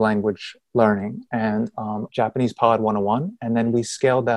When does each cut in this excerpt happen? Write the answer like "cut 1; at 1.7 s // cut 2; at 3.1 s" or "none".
cut 1; at 2.1 s